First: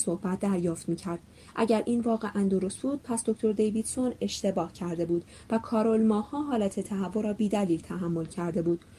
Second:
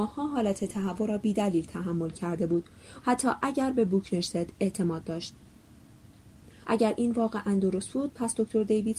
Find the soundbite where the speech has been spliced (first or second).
second